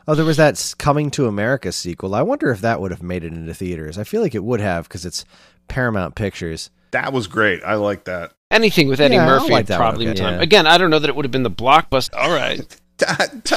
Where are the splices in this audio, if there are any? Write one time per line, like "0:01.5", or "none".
0:10.1
0:12.1